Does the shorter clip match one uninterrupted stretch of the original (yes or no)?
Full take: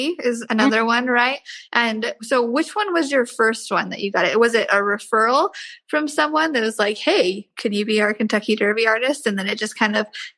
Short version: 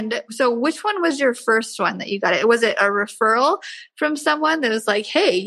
yes